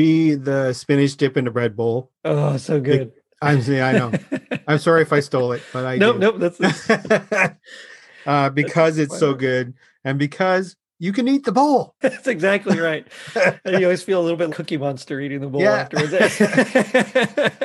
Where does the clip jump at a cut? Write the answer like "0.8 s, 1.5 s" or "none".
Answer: 12.0 s, 14.5 s